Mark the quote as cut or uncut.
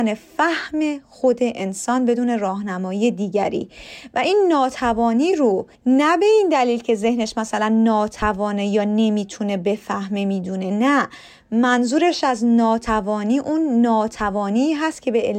cut